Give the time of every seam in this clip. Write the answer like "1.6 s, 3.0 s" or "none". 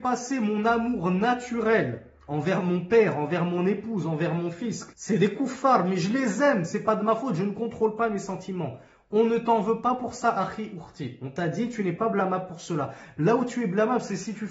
4.9 s